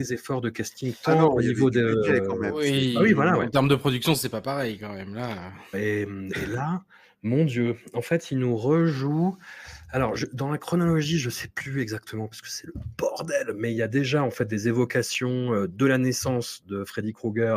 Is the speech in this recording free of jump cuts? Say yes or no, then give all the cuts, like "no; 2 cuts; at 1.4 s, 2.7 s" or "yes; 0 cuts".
no; 1 cut; at 5.7 s